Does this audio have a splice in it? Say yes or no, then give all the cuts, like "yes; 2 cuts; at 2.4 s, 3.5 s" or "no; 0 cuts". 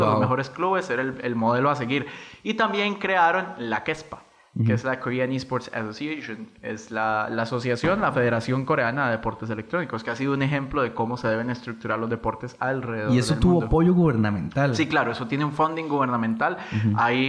no; 0 cuts